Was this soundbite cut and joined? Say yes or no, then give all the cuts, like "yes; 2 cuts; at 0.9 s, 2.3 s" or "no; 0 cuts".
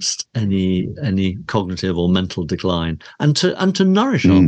no; 0 cuts